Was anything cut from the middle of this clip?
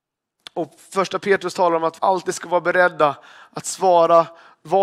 yes; 1 cut; at 2.0 s

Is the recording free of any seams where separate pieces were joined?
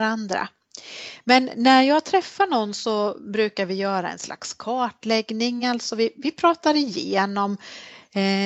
yes; 0 cuts

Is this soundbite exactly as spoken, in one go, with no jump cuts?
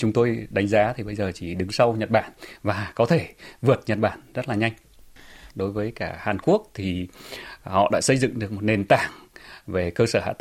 no; 1 cut; at 5.5 s

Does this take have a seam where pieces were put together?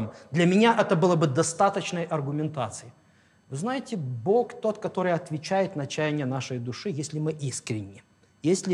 no; 0 cuts

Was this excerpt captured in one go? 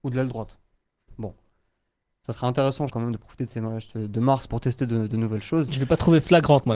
no; 3 cuts; at 2.9 s, 4.5 s, 5.7 s

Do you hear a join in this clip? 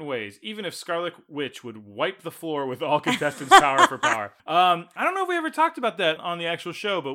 yes; 2 cuts; at 4.4 s, 6.2 s

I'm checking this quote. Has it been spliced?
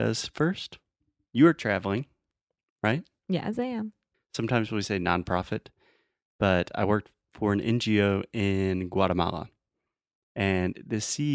yes; 1 cut; at 4.1 s

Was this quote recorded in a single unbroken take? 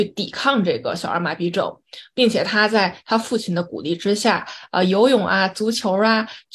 yes; 0 cuts

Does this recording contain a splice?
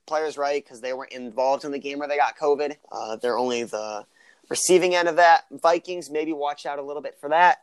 yes; 1 cut; at 2.8 s

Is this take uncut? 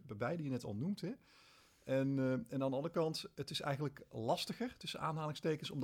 yes; 0 cuts

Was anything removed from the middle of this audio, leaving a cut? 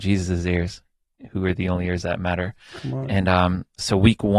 no; 0 cuts

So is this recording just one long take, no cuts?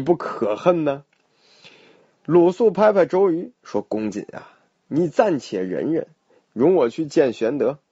yes; 0 cuts

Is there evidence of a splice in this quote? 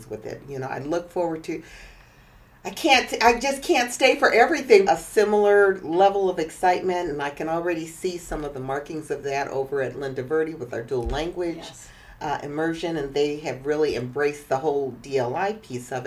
yes; 1 cut; at 4.9 s

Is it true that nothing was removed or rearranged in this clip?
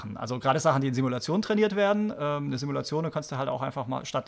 yes; 0 cuts

